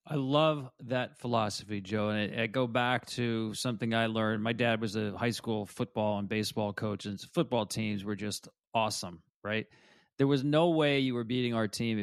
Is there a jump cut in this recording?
no; 0 cuts

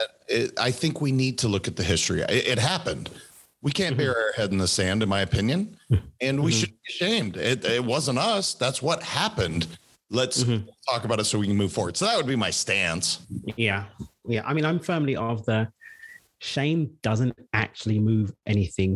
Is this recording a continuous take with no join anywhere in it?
yes; 0 cuts

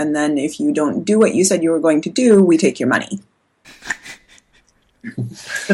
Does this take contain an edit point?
no; 0 cuts

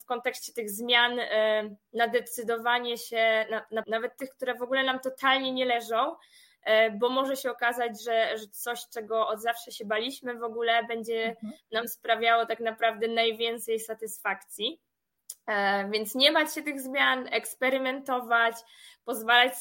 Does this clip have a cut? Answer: yes; 1 cut; at 3.8 s

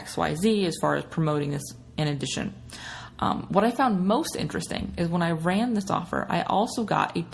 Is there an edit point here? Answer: no; 0 cuts

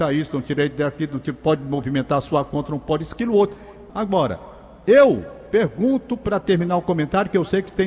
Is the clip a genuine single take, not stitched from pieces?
no; 1 cut; at 3.9 s

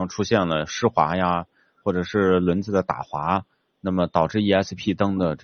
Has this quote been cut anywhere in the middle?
no; 0 cuts

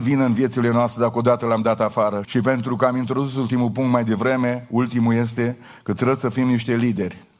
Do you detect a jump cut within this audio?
yes; 1 cut; at 2.2 s

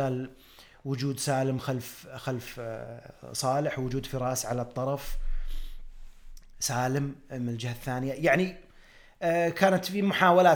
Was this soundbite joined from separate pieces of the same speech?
no; 0 cuts

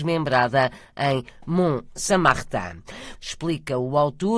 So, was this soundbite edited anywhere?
yes; 1 cut; at 3.1 s

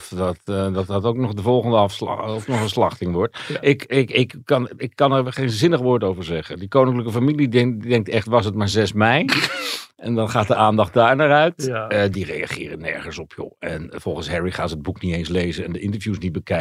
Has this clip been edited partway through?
no; 0 cuts

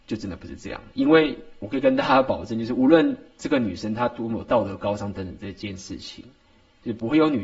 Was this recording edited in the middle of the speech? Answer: no; 0 cuts

